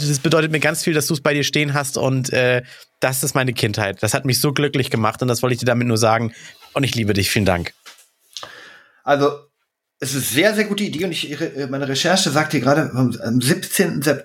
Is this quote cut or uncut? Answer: uncut